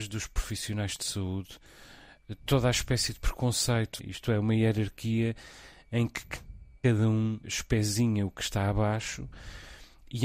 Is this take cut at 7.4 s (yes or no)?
yes